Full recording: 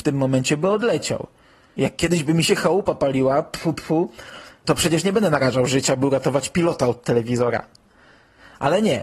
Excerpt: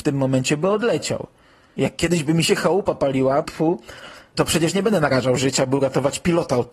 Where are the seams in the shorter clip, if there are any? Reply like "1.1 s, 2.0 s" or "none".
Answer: 3.4 s